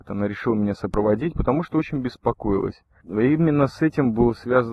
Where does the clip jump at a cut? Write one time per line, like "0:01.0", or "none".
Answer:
0:03.0